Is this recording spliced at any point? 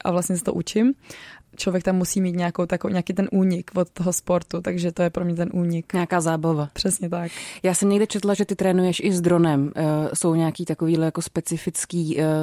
no; 0 cuts

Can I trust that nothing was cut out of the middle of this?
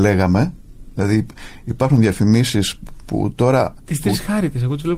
no; 1 cut; at 3.8 s

